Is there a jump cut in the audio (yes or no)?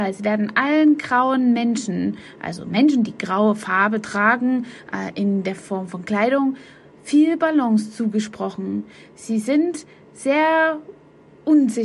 no